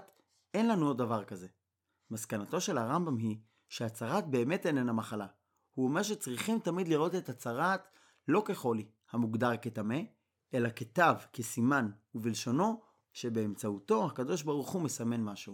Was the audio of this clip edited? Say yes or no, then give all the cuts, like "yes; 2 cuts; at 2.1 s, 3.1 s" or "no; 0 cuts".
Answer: yes; 1 cut; at 13.1 s